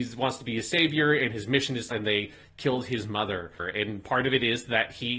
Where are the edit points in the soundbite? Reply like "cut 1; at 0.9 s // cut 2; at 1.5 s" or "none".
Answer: cut 1; at 1.9 s // cut 2; at 3.6 s